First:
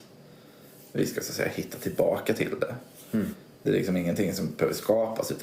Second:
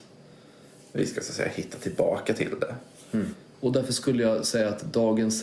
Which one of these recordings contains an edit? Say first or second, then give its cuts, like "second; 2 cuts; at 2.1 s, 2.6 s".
second; 1 cut; at 3.5 s